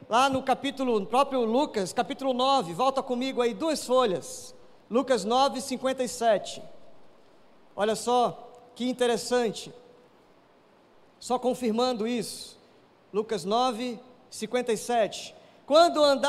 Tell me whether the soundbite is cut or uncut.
uncut